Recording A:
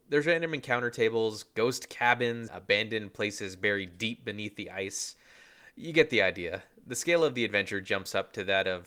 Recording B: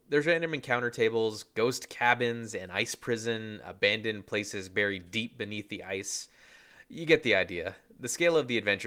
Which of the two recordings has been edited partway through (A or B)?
A